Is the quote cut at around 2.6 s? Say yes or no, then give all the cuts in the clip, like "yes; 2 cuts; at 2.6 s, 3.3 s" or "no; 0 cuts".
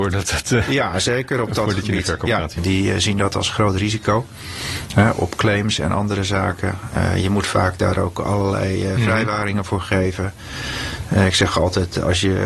yes; 1 cut; at 2.6 s